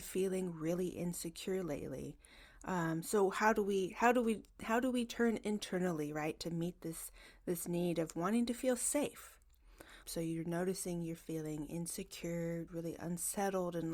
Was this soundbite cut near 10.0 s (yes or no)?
yes